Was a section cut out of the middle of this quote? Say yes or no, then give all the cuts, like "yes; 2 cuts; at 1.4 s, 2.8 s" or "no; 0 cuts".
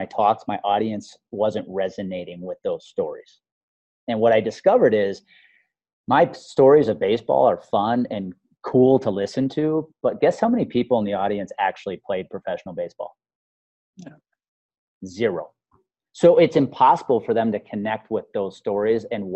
no; 0 cuts